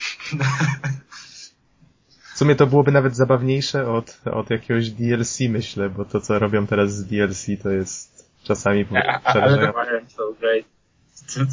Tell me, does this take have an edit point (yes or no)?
yes